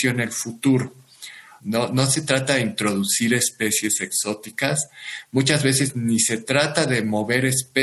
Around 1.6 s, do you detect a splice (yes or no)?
yes